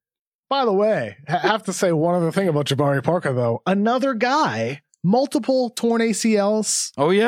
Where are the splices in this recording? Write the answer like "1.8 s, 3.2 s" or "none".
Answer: none